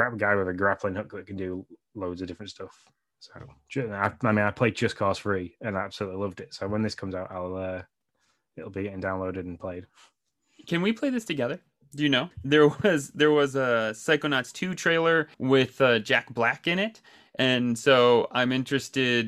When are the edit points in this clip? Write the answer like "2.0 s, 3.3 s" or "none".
12.3 s, 15.3 s